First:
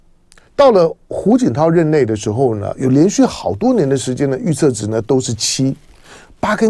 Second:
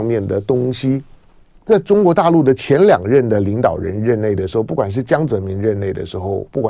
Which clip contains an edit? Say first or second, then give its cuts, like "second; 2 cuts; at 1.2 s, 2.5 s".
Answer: second; 1 cut; at 1.6 s